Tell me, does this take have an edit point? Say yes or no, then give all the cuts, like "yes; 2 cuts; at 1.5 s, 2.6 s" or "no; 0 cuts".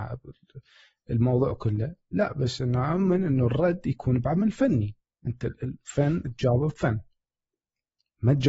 no; 0 cuts